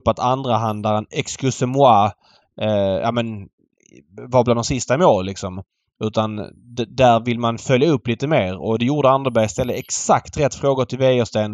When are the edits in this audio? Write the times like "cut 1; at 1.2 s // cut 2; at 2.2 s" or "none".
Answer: none